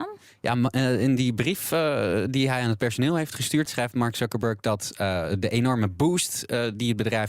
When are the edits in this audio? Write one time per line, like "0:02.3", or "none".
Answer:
0:03.7